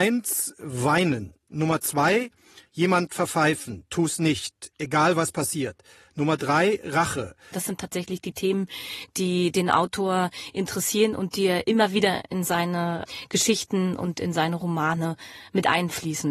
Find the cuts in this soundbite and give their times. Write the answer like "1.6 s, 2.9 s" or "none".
1.5 s, 7.5 s